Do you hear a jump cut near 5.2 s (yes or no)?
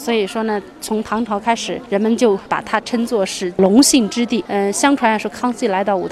no